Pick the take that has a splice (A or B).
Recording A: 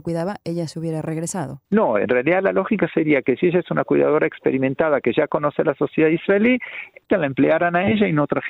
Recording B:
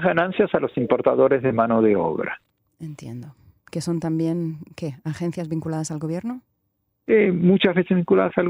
A